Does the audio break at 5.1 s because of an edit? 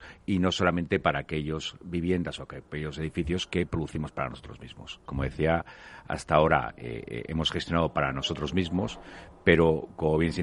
yes; 1 cut; at 5.1 s

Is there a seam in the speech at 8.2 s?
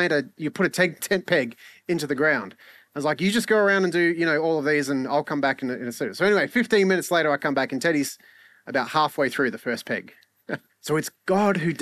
no; 2 cuts; at 1.0 s, 10.7 s

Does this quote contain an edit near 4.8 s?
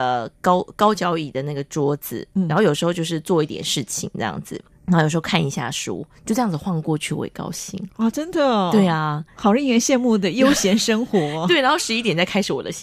yes; 1 cut; at 4.8 s

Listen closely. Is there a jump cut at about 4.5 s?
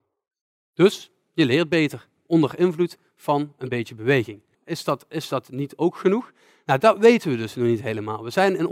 yes; 1 cut; at 4.5 s

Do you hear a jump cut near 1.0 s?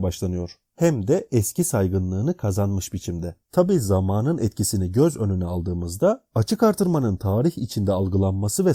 no; 1 cut; at 3.4 s

